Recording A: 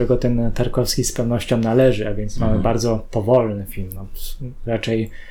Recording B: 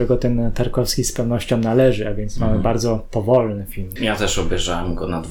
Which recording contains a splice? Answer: B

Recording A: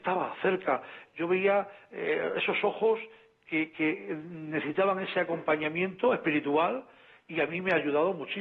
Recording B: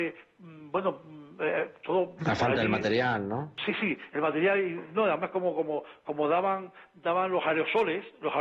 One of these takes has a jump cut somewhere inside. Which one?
A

